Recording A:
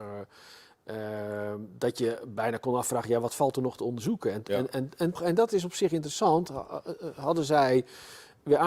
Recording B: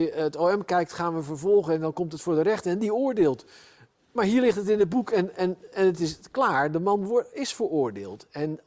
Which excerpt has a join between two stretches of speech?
A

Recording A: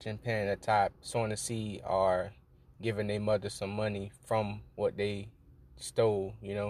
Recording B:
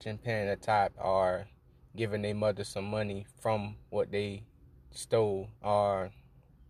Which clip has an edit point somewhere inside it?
B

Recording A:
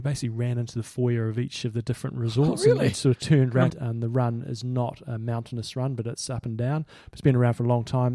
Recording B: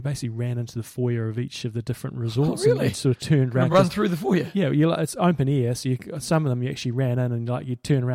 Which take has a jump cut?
A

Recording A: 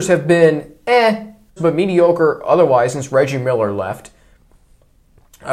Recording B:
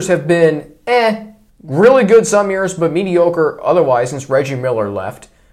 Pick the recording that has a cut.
A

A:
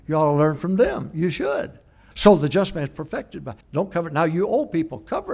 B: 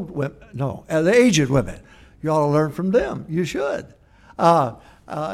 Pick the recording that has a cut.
A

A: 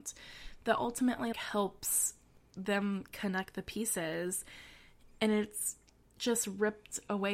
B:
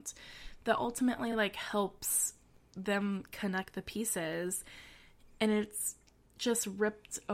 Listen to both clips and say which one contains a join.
A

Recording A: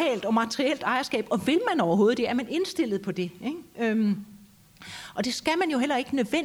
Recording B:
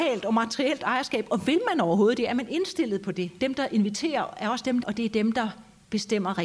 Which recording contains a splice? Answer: B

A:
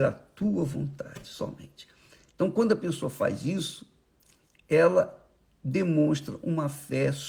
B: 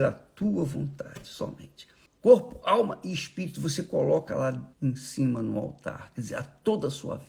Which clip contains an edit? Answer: B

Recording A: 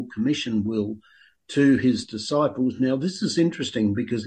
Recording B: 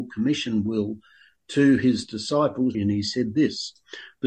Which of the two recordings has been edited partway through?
B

